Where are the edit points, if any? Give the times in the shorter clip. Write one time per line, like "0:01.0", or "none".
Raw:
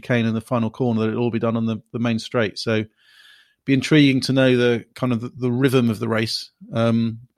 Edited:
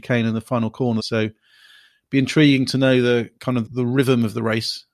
0:01.0
0:03.7